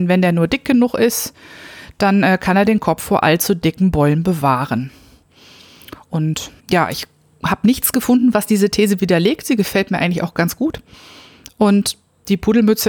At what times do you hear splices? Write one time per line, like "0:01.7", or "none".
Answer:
0:06.6